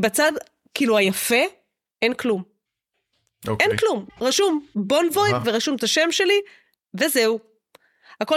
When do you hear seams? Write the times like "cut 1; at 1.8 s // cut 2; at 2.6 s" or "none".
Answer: none

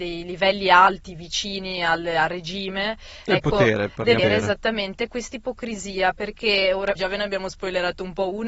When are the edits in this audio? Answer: cut 1; at 4.2 s // cut 2; at 7.0 s

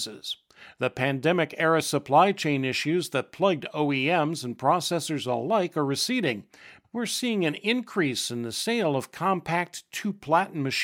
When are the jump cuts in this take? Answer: cut 1; at 6.8 s

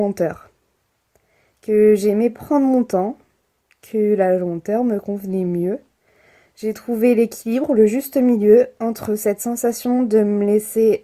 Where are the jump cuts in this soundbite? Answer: none

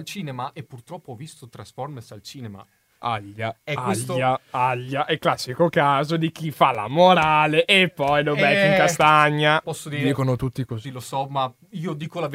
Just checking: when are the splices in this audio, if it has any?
cut 1; at 9.6 s // cut 2; at 10.8 s

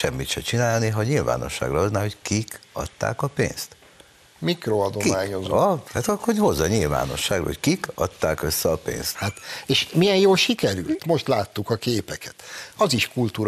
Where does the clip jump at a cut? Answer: cut 1; at 5.9 s // cut 2; at 9.2 s // cut 3; at 11.0 s

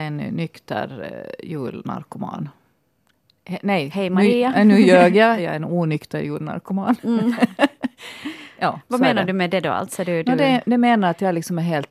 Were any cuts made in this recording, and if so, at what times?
cut 1; at 5.4 s

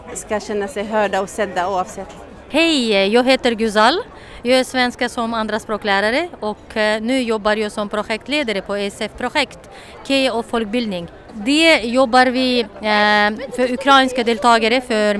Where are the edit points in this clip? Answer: none

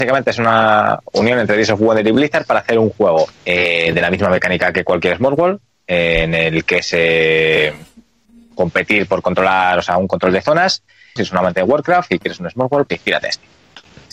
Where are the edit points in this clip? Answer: cut 1; at 3.4 s // cut 2; at 11.2 s // cut 3; at 12.9 s

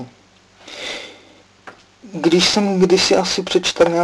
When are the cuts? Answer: none

